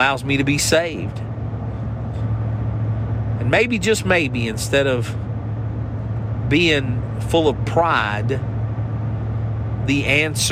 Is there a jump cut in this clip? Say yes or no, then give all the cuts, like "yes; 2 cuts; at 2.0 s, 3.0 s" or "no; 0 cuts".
yes; 1 cut; at 2.1 s